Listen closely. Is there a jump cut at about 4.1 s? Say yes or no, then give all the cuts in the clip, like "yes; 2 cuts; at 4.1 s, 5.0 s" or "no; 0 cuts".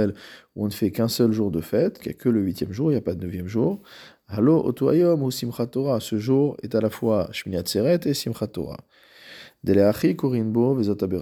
no; 1 cut; at 2.0 s